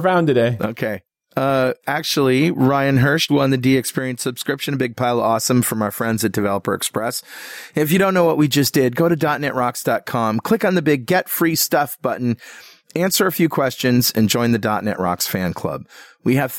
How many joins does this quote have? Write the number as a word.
one